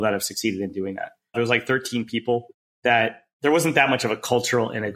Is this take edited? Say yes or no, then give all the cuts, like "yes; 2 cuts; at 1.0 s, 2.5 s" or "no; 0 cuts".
yes; 1 cut; at 1.3 s